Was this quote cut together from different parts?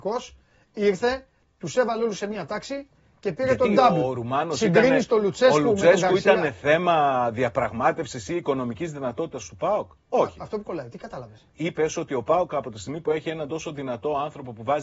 no; 0 cuts

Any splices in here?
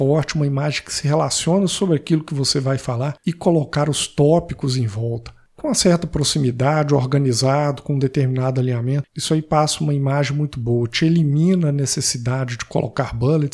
no; 0 cuts

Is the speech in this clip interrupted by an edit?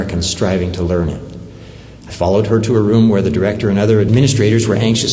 yes; 1 cut; at 2.0 s

